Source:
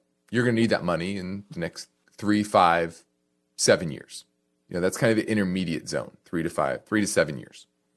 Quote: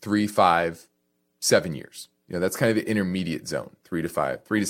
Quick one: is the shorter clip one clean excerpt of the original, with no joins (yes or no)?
no